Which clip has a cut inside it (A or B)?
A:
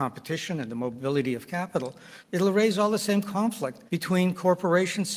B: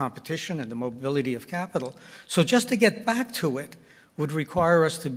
A